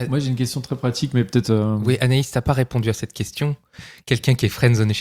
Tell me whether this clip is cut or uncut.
uncut